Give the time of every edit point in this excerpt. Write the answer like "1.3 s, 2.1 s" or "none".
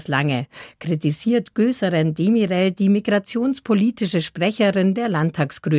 none